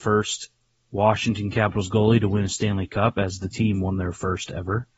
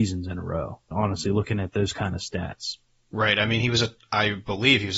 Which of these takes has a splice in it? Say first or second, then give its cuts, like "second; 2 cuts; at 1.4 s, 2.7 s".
second; 1 cut; at 0.9 s